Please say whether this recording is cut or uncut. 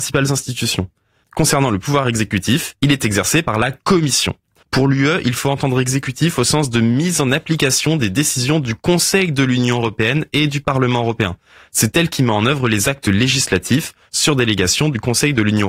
cut